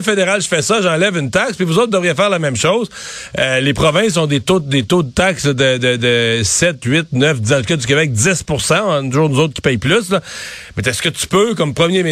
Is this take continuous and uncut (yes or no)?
yes